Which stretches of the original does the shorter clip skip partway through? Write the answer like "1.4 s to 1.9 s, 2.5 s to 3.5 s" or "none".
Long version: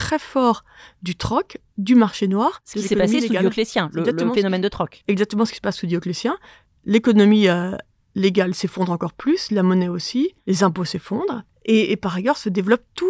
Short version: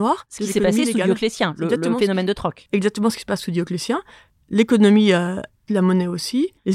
8.0 s to 9.5 s